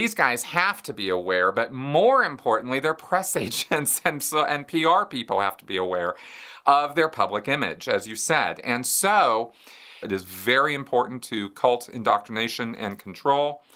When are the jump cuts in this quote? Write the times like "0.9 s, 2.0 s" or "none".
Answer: 10.0 s